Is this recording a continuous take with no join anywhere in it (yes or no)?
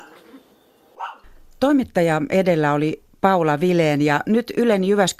yes